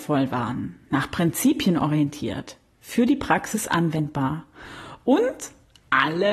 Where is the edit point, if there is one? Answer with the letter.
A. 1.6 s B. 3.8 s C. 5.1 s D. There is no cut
D